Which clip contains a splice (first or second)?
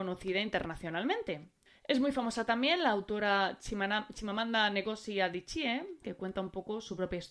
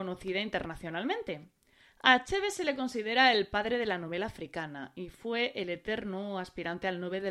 first